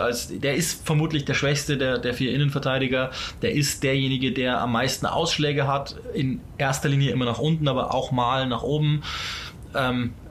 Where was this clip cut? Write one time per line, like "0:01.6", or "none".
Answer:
none